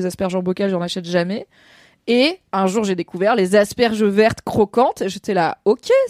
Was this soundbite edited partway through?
no; 0 cuts

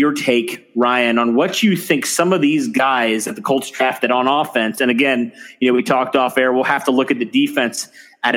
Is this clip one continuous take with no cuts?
yes; 0 cuts

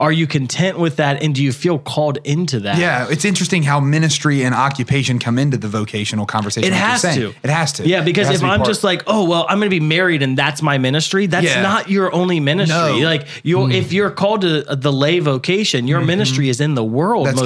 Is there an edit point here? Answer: no; 0 cuts

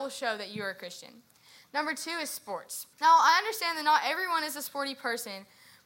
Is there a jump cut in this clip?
yes; 1 cut; at 2.9 s

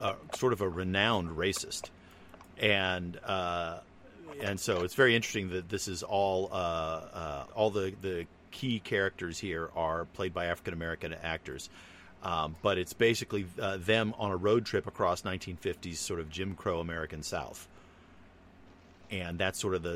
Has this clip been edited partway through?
yes; 1 cut; at 7.5 s

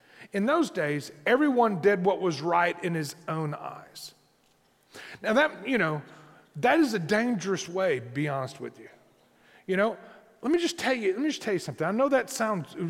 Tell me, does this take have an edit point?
no; 0 cuts

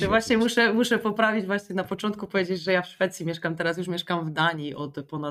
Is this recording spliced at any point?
no; 0 cuts

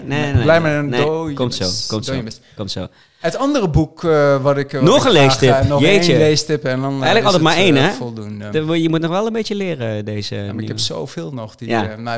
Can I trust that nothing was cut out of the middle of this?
yes; 0 cuts

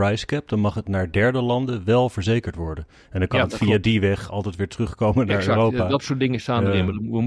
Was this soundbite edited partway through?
no; 0 cuts

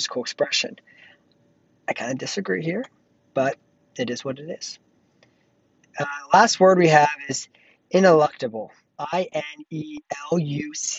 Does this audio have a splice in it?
no; 0 cuts

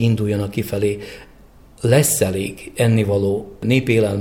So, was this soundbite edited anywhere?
no; 0 cuts

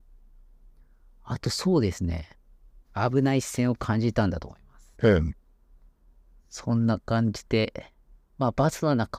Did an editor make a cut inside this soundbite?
yes; 2 cuts; at 2.8 s, 4.9 s

